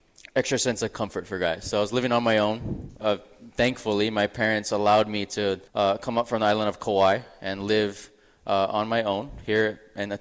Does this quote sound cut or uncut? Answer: cut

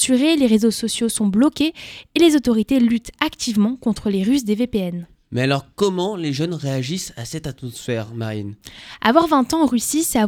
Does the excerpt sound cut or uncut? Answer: uncut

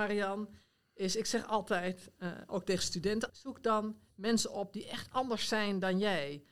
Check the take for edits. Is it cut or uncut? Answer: cut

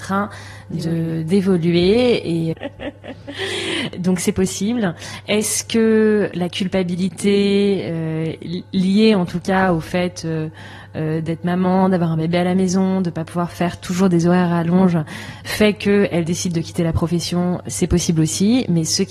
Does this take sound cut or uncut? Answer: cut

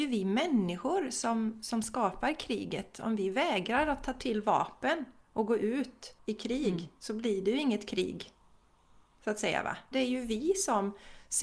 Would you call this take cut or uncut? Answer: cut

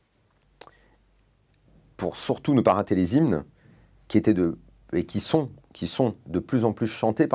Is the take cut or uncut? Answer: uncut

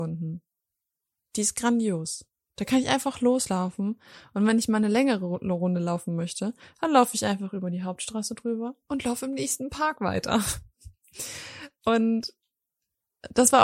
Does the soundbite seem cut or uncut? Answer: uncut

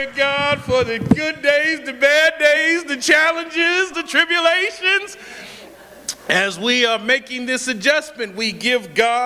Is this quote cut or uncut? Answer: cut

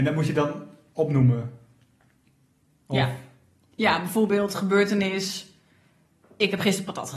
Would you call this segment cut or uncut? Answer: uncut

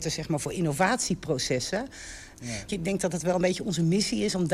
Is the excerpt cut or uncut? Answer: cut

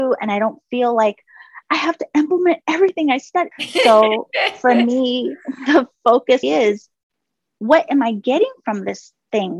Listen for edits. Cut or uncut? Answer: cut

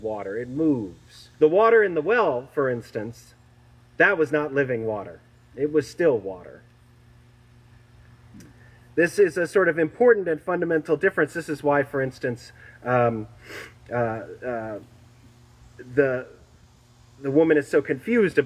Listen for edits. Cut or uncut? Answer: cut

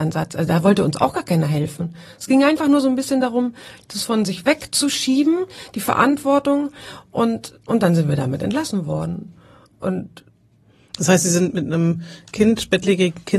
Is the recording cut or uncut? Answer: uncut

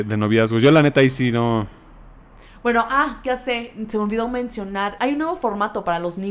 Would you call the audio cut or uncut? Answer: cut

